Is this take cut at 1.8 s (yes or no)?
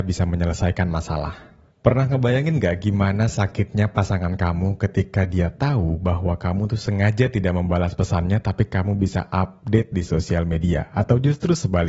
yes